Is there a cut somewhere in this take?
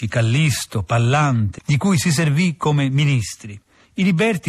yes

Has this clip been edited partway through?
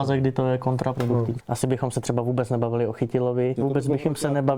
yes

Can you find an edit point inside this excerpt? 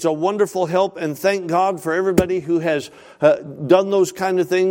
no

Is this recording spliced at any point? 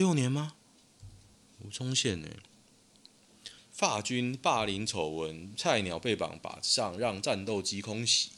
yes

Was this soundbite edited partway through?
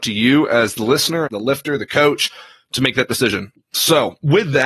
yes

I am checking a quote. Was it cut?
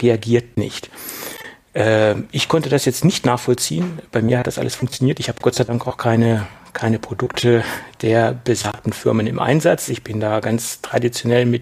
no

